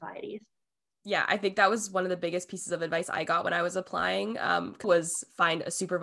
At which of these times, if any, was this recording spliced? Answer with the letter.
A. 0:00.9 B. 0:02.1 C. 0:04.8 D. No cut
C